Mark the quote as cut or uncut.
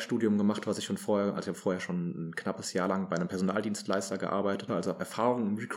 cut